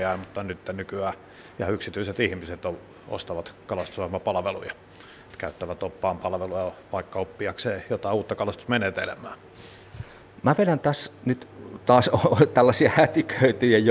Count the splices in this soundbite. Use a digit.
0